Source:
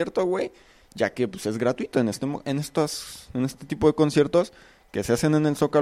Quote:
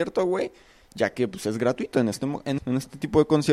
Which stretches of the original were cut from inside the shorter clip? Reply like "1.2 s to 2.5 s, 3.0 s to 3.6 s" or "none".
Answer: 2.6 s to 3.3 s